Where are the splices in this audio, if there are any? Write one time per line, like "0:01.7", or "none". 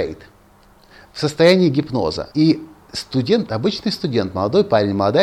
0:02.3